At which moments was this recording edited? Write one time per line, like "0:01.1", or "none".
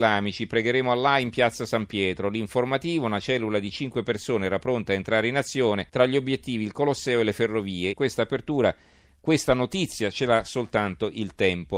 0:05.9
0:07.9